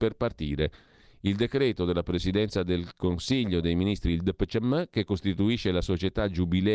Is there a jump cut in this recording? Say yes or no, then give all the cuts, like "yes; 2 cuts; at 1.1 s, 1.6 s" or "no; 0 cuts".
no; 0 cuts